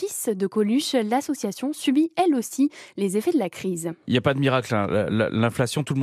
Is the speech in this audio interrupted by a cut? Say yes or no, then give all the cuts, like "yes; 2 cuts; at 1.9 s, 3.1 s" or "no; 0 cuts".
no; 0 cuts